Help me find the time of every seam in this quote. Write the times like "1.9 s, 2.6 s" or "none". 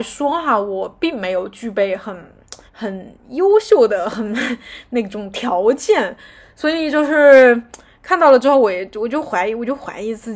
2.7 s